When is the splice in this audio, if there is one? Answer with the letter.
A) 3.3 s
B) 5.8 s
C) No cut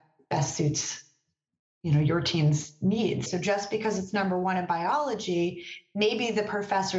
A